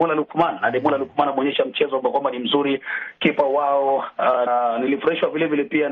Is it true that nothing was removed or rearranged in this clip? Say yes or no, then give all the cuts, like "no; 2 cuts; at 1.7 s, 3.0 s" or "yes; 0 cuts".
no; 1 cut; at 4.5 s